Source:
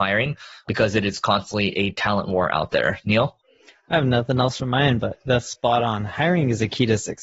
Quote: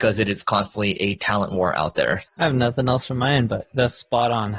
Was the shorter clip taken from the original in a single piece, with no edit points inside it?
no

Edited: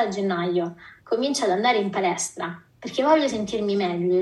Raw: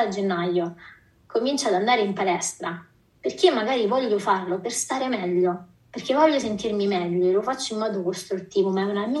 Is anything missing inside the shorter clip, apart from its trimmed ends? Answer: yes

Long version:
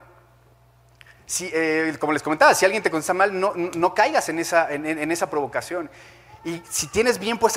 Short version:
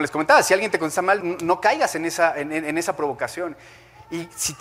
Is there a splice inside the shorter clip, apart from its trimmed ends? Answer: yes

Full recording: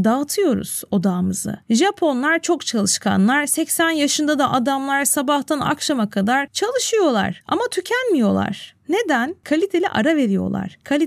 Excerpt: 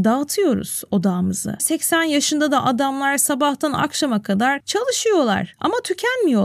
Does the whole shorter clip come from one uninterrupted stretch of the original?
no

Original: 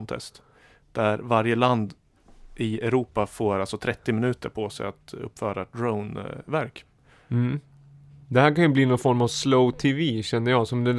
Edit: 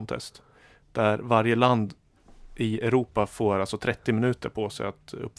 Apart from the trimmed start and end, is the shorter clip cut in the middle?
no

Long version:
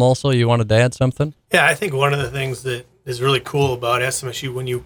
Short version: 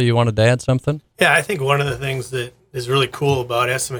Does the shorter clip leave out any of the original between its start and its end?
no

